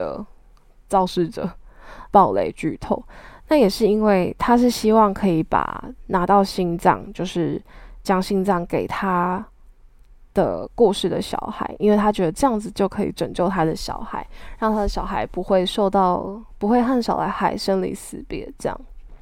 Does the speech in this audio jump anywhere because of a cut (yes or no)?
yes